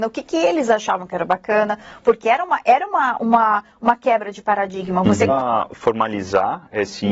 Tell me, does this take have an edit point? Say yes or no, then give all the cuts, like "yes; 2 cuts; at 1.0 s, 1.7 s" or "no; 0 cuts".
yes; 1 cut; at 5.3 s